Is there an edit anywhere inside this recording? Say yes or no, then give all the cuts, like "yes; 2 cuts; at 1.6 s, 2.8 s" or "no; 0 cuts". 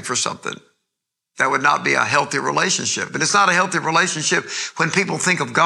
no; 0 cuts